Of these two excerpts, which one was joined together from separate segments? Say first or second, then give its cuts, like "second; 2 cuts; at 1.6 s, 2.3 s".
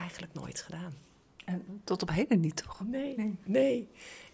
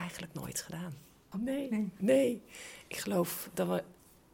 second; 1 cut; at 1.3 s